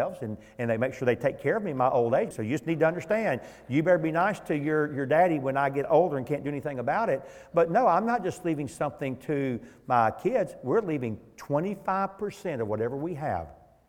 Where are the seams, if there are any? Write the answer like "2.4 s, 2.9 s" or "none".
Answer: 2.3 s